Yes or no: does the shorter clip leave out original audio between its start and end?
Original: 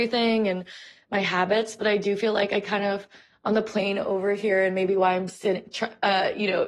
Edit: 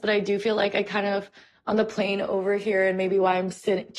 no